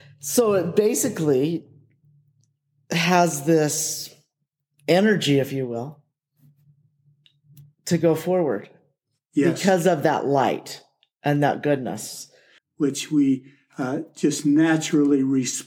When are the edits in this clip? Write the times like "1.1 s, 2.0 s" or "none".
12.6 s